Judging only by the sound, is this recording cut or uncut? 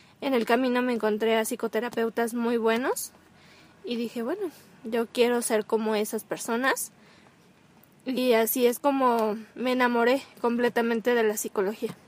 uncut